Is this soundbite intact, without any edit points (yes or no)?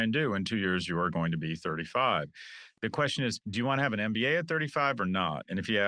yes